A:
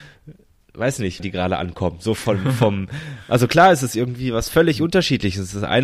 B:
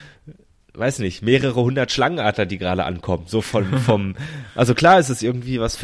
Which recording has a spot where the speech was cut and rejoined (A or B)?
A